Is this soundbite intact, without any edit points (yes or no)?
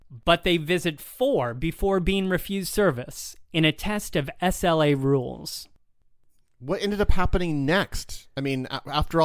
yes